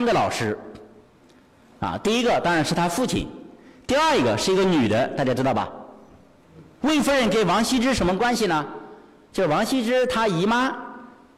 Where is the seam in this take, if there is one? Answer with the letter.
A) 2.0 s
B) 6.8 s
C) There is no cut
B